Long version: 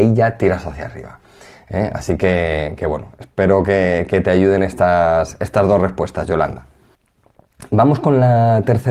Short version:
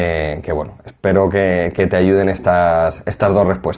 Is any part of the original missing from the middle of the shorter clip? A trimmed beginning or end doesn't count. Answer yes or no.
no